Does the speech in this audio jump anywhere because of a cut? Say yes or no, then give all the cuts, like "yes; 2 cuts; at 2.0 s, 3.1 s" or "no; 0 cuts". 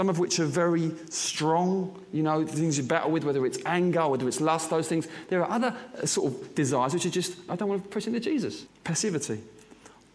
yes; 2 cuts; at 7.5 s, 8.7 s